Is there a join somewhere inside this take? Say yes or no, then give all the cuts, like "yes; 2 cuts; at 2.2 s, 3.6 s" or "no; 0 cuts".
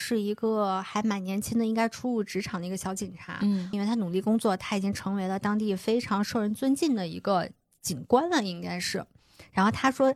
yes; 1 cut; at 3.7 s